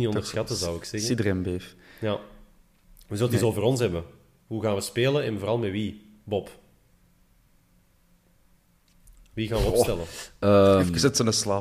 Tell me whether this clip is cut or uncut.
uncut